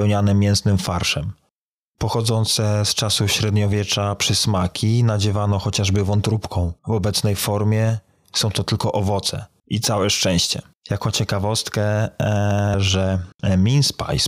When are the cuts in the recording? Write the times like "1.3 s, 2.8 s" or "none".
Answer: 6.8 s, 10.8 s, 12.7 s